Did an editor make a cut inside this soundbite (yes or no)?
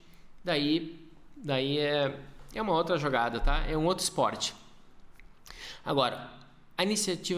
no